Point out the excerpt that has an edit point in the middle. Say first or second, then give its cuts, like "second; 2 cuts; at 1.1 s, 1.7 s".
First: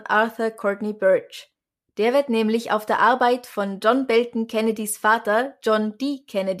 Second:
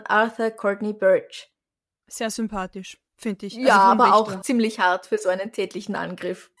second; 1 cut; at 1.9 s